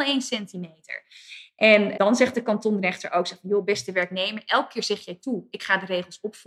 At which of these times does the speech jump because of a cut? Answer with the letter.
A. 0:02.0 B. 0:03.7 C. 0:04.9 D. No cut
A